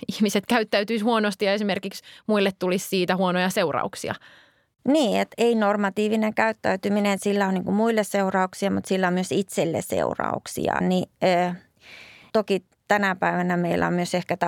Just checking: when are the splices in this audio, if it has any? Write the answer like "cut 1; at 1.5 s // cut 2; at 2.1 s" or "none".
cut 1; at 10.8 s // cut 2; at 12.3 s